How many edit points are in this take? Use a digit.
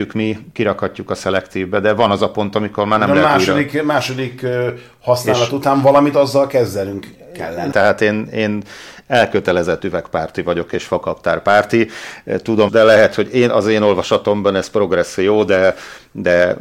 2